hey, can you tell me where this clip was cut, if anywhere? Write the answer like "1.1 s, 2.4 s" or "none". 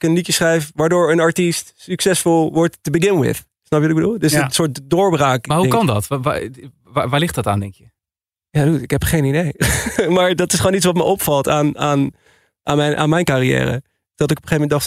none

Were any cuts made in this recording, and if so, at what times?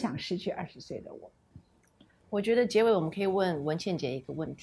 2.2 s

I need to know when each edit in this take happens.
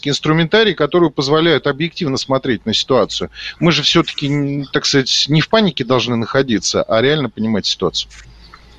none

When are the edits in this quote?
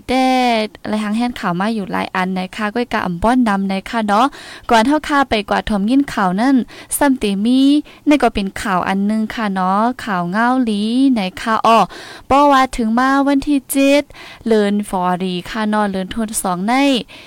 14.9 s

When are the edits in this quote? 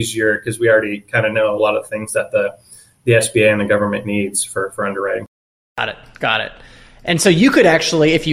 5.6 s

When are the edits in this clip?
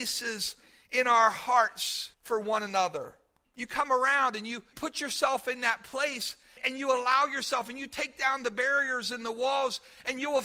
none

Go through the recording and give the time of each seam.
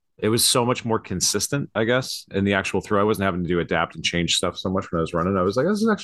none

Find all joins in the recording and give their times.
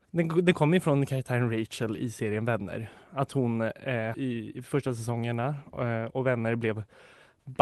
4.1 s

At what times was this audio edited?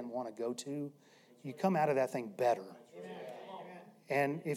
none

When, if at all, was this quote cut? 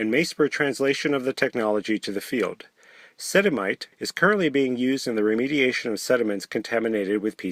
3.9 s

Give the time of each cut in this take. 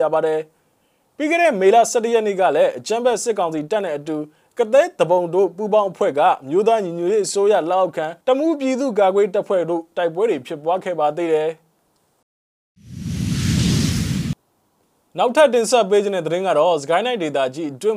8.2 s

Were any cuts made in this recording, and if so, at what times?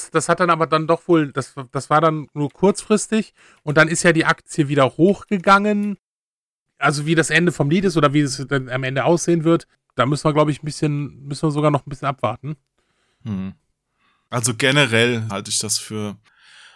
14.3 s, 15.3 s

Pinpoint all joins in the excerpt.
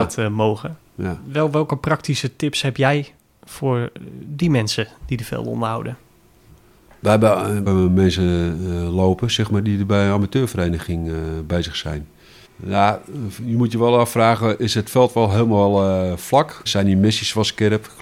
7.7 s, 12.5 s, 16.7 s

